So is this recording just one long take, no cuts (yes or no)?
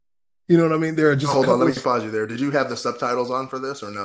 yes